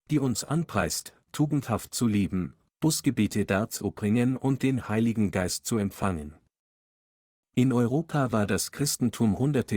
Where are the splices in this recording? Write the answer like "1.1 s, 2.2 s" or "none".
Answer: 7.5 s

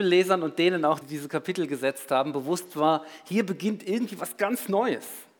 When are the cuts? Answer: 1.0 s

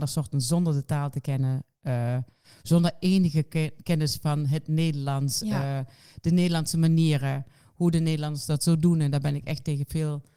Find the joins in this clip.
none

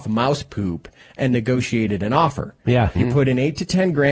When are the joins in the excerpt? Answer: 3.0 s

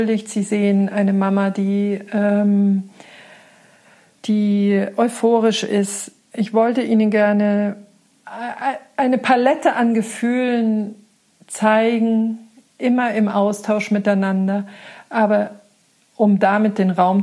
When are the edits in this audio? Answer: 4.2 s

